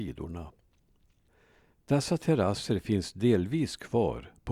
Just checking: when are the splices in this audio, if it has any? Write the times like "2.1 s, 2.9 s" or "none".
none